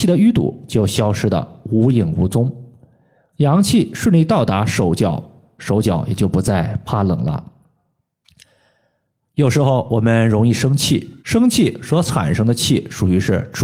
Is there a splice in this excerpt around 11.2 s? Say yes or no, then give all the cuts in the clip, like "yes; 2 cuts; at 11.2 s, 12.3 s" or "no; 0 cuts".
yes; 1 cut; at 11.2 s